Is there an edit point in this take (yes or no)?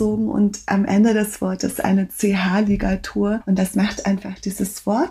no